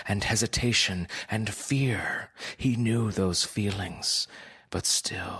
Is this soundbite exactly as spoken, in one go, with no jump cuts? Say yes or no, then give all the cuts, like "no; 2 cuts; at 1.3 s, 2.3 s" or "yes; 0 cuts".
yes; 0 cuts